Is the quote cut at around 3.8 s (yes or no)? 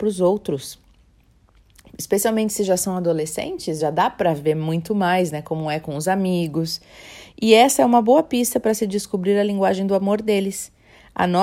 no